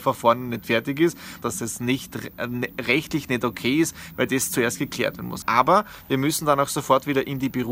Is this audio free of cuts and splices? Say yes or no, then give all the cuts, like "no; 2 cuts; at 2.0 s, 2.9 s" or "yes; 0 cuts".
no; 2 cuts; at 1.4 s, 5.4 s